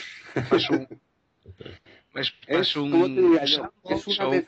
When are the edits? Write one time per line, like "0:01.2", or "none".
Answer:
none